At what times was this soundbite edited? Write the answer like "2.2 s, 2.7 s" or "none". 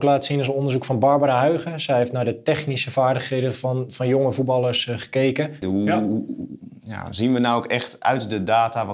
5.6 s